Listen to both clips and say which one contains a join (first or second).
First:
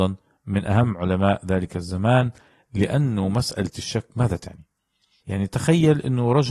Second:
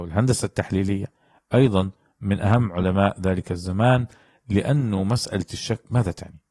first